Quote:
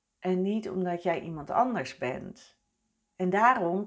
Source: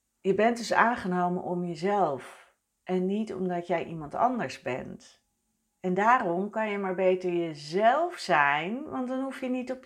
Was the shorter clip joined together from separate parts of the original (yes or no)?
no